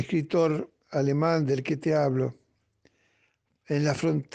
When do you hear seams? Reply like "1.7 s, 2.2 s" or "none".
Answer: none

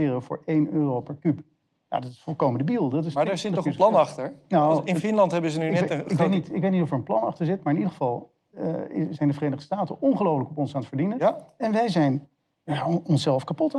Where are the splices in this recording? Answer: none

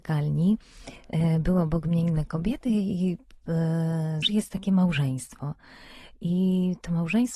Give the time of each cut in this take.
4.2 s

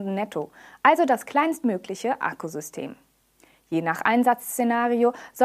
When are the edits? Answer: none

